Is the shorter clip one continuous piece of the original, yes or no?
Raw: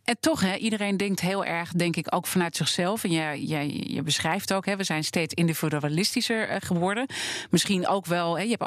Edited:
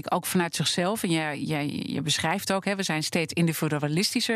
yes